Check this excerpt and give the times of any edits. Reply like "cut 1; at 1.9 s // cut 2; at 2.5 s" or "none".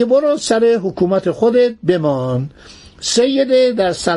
none